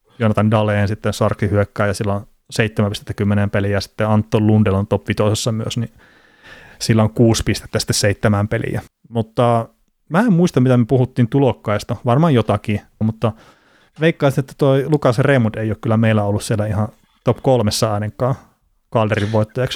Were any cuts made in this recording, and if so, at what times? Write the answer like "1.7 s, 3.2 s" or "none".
8.9 s, 13.0 s